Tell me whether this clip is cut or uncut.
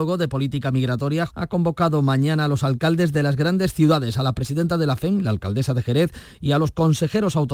cut